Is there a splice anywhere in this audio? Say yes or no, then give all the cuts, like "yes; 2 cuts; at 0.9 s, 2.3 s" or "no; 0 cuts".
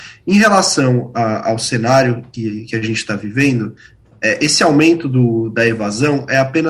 no; 0 cuts